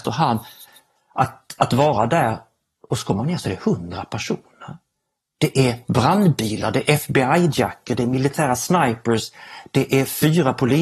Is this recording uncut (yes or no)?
no